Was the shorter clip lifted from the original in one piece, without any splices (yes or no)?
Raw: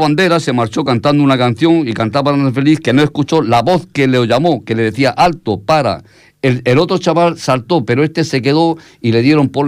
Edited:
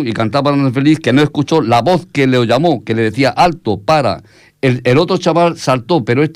yes